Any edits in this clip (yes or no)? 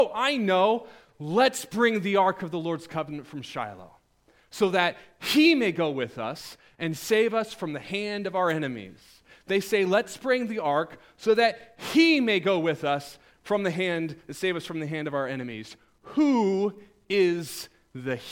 no